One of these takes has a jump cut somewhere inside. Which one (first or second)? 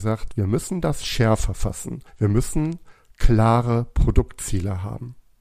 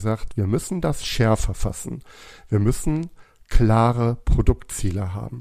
first